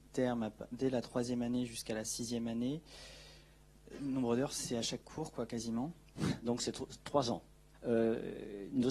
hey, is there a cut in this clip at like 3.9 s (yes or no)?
no